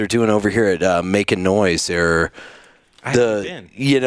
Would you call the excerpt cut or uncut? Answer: uncut